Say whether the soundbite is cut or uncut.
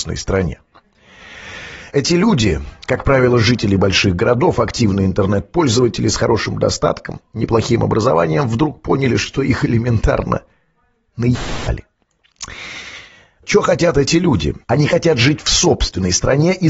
cut